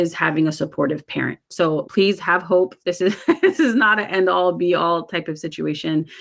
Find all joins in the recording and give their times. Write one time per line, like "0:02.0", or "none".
0:01.8